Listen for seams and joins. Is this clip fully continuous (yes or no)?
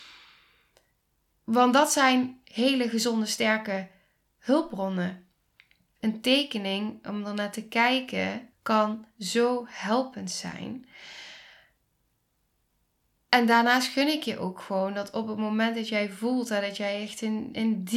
no